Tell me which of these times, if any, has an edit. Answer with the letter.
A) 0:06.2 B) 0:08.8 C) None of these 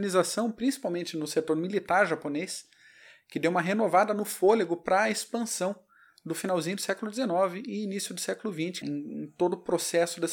B